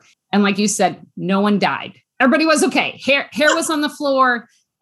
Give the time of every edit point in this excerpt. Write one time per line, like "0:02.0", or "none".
none